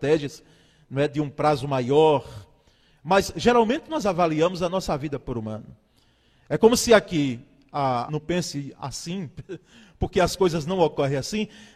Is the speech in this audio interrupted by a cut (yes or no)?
yes